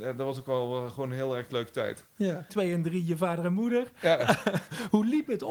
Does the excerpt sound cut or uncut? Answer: cut